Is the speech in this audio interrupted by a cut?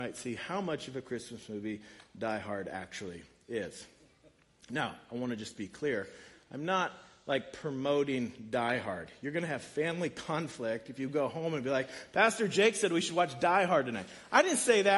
no; 0 cuts

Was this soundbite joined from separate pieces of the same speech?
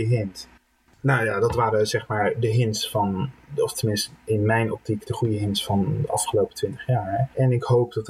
no; 0 cuts

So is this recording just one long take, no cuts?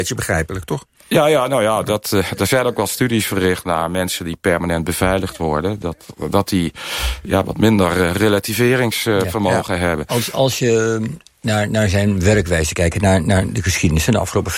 yes; 0 cuts

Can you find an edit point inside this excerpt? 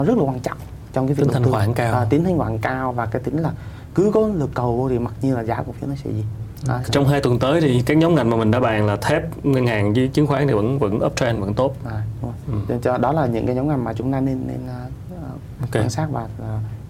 yes; 2 cuts; at 6.9 s, 15.6 s

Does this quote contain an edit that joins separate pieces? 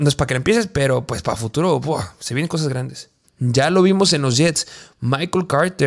yes; 1 cut; at 3.2 s

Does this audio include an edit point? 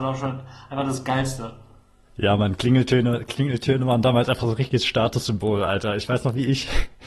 no; 0 cuts

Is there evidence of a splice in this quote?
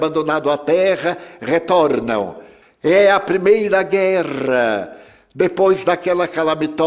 yes; 1 cut; at 2.6 s

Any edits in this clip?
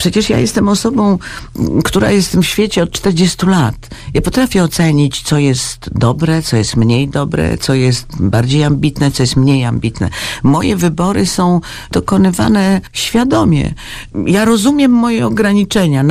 no; 0 cuts

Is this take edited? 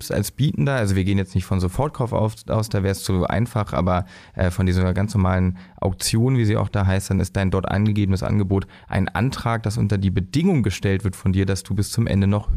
no; 0 cuts

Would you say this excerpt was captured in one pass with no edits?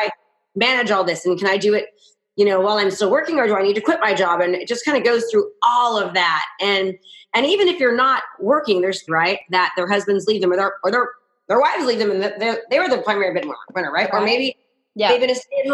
no; 1 cut; at 9.1 s

